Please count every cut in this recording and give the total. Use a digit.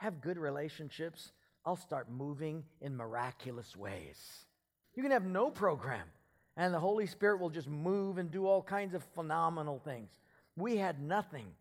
1